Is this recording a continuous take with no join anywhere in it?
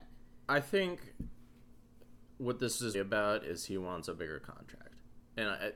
no; 1 cut; at 2.9 s

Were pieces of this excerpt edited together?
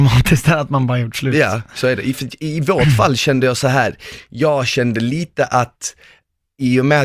no; 0 cuts

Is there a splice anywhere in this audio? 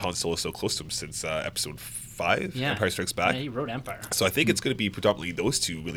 no; 0 cuts

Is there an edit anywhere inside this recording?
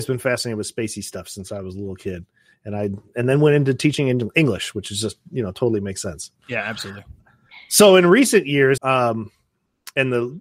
yes; 1 cut; at 8.8 s

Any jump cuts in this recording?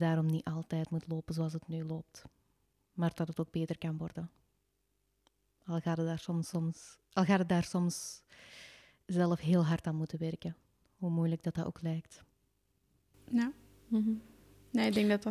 no; 0 cuts

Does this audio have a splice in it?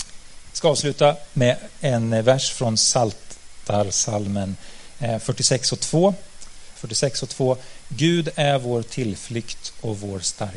yes; 1 cut; at 6.8 s

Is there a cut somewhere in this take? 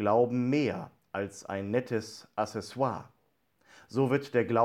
no; 0 cuts

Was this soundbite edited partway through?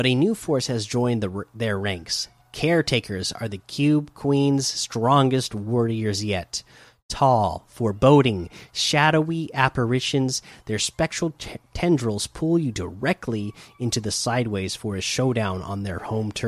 no; 0 cuts

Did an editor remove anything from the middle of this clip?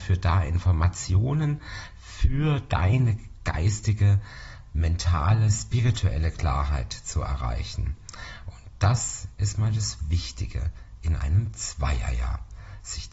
no; 0 cuts

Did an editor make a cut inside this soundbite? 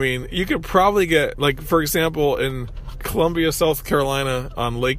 no; 0 cuts

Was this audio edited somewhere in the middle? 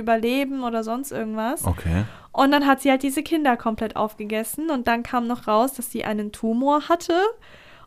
no; 0 cuts

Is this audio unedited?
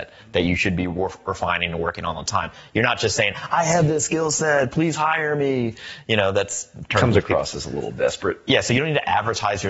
yes; 0 cuts

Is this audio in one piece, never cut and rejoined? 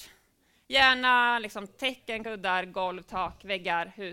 yes; 0 cuts

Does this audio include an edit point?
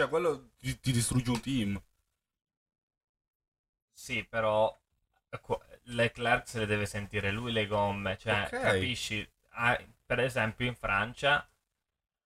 no; 0 cuts

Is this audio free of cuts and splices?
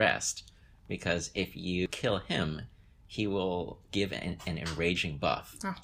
yes; 0 cuts

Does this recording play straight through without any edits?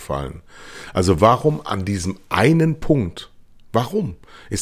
yes; 0 cuts

